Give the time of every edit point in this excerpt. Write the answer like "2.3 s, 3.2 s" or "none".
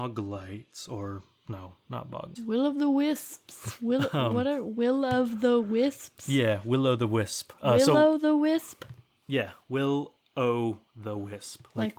2.4 s